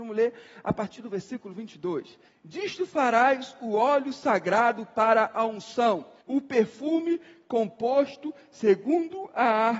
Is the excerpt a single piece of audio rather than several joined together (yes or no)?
no